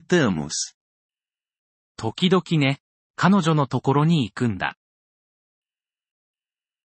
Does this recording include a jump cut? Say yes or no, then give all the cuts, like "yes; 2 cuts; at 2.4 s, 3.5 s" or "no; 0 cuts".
yes; 1 cut; at 3.0 s